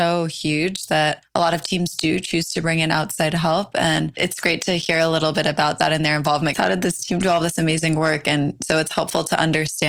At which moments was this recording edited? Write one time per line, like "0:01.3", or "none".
0:06.5